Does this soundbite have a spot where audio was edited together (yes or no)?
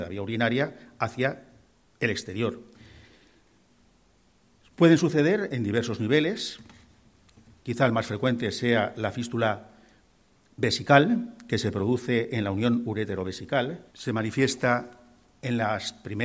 yes